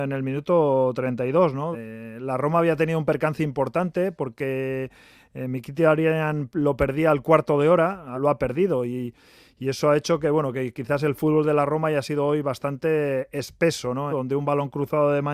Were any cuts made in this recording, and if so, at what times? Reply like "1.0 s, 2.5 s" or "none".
1.7 s, 8.1 s, 14.1 s